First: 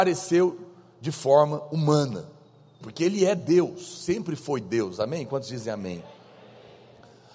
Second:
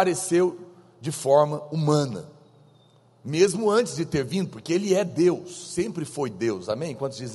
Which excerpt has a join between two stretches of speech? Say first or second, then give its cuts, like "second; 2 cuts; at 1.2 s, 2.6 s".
first; 1 cut; at 2.8 s